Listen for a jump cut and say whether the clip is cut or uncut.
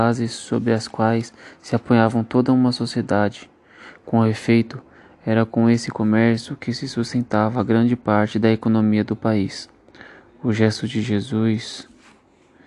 uncut